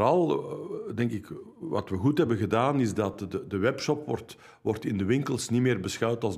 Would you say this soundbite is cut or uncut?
uncut